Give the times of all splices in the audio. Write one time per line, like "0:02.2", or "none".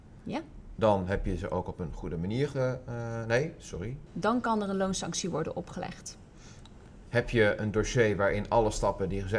0:04.1
0:07.0